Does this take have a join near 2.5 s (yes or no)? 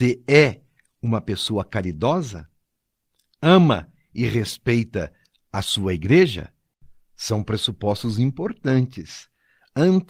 no